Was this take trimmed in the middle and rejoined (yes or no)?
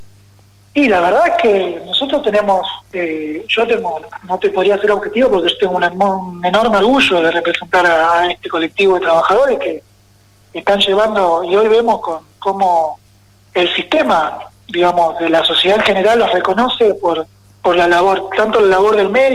no